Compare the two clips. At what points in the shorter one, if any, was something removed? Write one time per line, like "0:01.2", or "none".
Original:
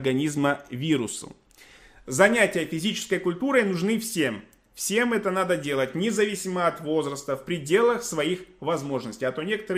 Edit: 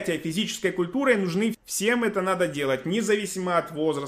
0:01.5